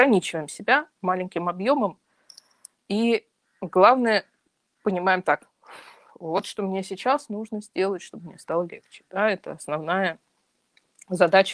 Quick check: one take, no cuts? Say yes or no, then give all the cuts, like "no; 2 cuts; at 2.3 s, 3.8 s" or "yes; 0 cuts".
yes; 0 cuts